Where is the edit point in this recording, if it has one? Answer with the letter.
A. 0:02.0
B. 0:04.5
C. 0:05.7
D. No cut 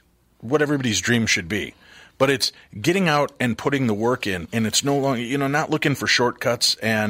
B